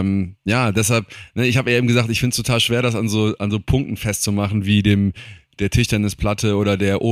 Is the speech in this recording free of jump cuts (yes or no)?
yes